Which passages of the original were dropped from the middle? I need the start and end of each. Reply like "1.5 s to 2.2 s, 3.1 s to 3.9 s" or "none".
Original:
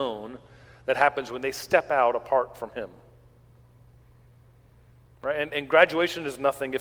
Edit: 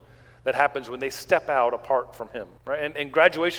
3.0 s to 5.1 s

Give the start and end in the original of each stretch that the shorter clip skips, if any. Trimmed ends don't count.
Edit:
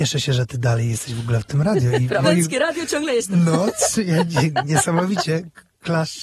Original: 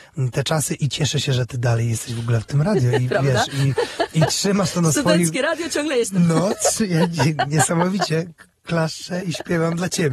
3.2 s to 5.1 s

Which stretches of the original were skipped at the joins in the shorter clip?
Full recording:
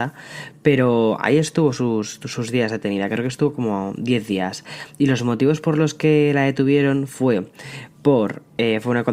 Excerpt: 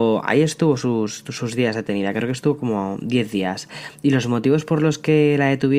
none

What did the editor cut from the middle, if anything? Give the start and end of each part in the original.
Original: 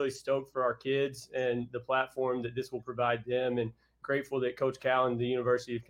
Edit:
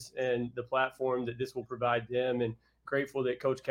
none

